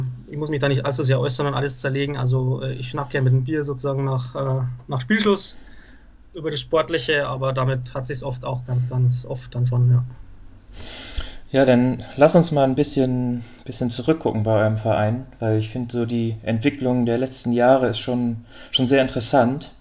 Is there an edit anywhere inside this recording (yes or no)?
no